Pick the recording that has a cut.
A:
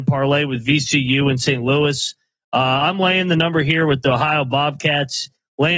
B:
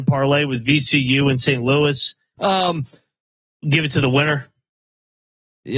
B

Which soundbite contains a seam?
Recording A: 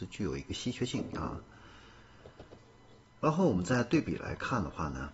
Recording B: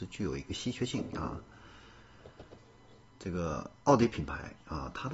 B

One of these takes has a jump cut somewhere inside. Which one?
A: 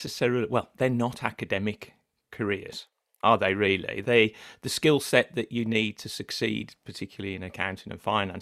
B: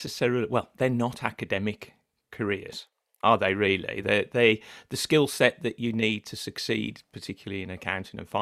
A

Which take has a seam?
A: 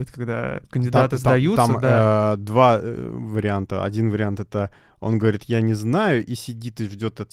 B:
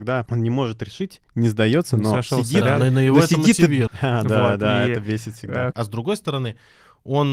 B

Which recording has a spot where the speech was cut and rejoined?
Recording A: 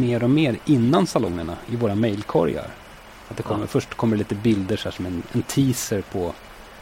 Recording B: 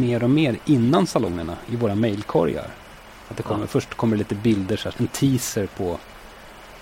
B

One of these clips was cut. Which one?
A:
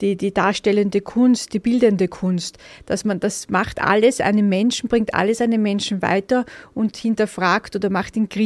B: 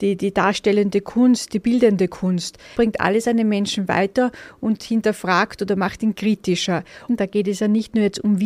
B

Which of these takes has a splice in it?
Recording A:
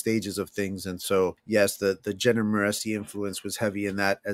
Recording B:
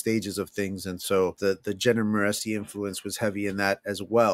B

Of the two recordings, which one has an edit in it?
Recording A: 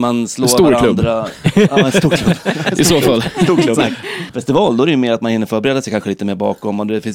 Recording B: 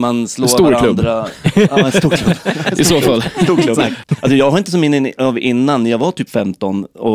B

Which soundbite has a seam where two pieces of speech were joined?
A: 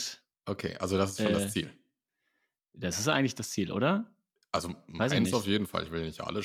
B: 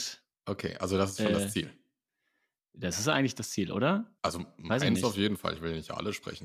B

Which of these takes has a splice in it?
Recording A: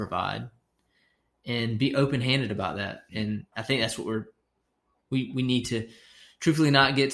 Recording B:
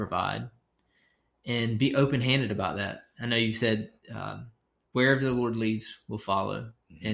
A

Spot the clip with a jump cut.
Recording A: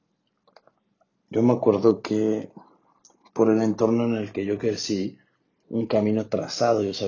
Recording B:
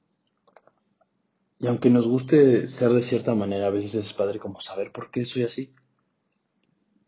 A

